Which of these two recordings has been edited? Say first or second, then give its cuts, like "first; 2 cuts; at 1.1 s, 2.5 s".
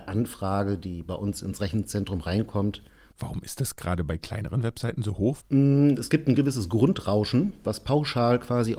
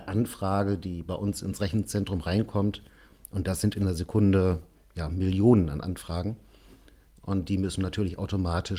first; 2 cuts; at 3.1 s, 5.4 s